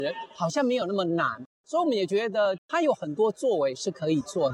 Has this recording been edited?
yes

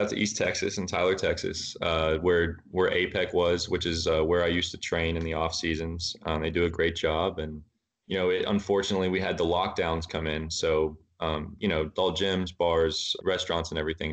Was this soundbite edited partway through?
yes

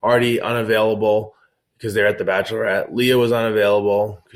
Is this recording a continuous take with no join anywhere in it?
yes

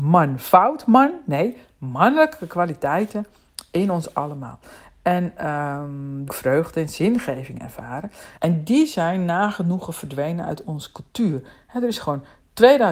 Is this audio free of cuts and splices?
no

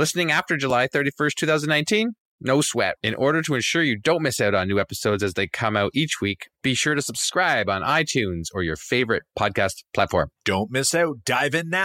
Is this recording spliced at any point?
yes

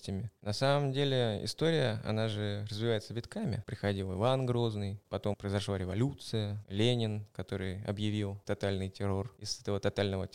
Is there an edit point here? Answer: yes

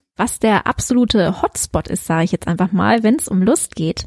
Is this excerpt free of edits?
yes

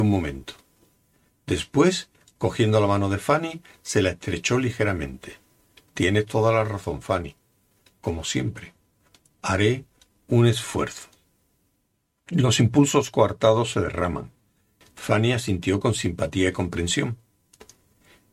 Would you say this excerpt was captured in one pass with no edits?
no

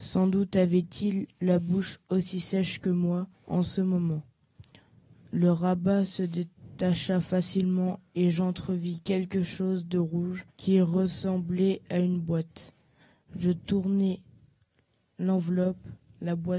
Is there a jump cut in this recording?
yes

